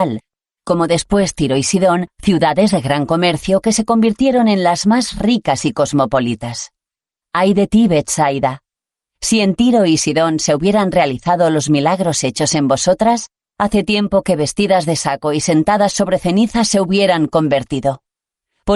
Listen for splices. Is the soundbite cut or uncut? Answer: cut